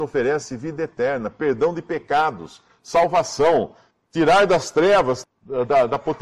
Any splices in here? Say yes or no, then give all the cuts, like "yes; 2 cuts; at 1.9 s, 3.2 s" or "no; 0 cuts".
yes; 1 cut; at 5.2 s